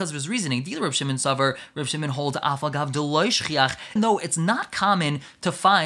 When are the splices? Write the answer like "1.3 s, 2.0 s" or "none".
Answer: 4.0 s